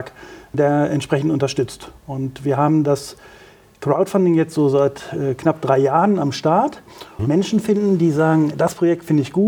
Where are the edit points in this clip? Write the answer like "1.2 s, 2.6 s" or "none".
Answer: 7.2 s